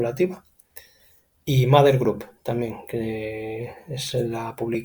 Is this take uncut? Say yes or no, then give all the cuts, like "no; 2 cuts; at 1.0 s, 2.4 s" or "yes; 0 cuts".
yes; 0 cuts